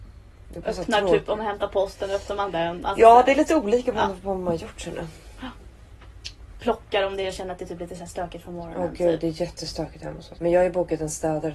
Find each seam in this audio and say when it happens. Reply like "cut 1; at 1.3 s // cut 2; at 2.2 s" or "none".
cut 1; at 10.4 s